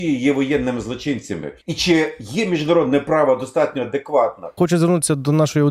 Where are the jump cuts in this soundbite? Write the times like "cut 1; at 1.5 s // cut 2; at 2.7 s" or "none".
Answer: cut 1; at 1.6 s // cut 2; at 4.6 s